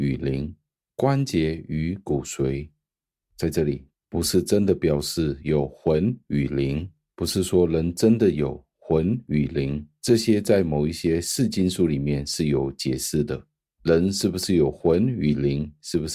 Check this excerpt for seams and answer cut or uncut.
cut